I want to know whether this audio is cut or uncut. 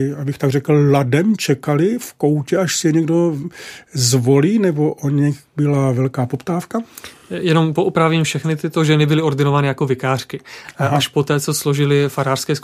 uncut